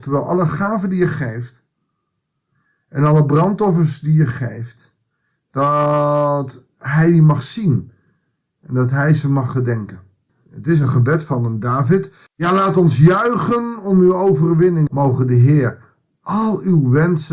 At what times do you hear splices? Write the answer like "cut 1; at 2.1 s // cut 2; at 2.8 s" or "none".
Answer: cut 1; at 10.3 s // cut 2; at 12.3 s // cut 3; at 14.9 s